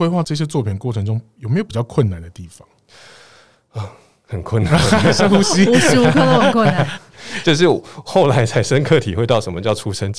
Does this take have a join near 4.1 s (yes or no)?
no